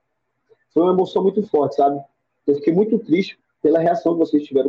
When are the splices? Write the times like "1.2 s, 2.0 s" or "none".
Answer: 2.3 s, 3.4 s

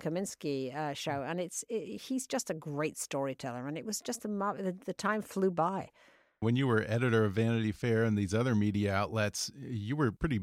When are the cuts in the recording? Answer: none

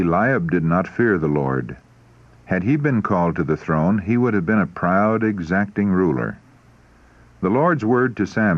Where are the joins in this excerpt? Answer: none

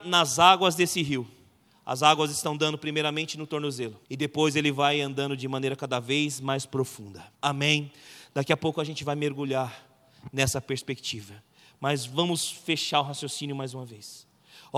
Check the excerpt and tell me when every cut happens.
4.1 s, 7.4 s

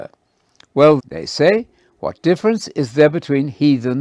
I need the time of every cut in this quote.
1.0 s

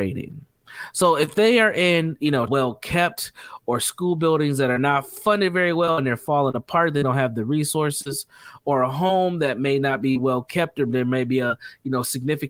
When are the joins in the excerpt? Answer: 2.5 s

